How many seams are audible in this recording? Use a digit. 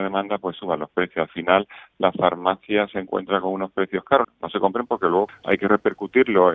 2